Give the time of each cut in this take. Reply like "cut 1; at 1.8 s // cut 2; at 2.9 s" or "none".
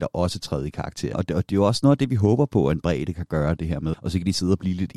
cut 1; at 1.1 s // cut 2; at 3.9 s